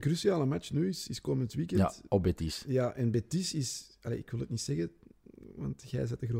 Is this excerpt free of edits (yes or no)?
yes